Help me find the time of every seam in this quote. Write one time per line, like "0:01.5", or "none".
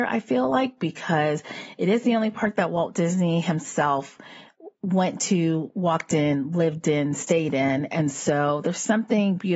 none